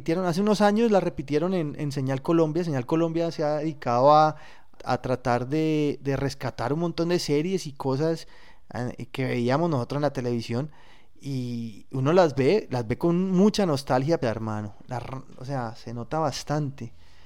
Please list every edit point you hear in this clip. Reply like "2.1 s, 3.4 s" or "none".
4.8 s, 14.2 s